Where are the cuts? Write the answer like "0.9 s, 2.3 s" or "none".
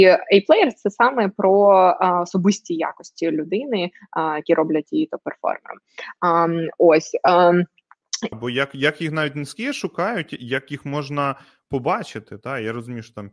8.3 s